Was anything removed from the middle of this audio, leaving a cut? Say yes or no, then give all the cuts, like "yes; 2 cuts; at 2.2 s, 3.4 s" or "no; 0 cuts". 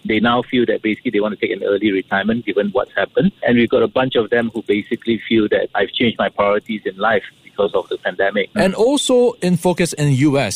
yes; 2 cuts; at 3.4 s, 8.5 s